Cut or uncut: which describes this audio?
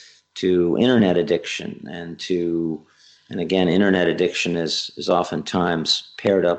uncut